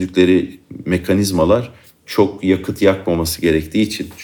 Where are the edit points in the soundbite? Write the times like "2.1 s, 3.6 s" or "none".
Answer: none